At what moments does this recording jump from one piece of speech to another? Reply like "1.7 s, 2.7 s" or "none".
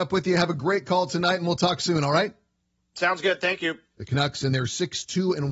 3.9 s